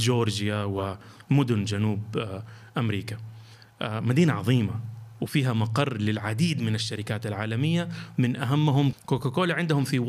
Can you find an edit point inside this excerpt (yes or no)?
yes